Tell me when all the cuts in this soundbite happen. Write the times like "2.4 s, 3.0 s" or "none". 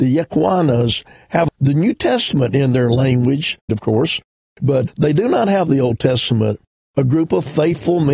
3.7 s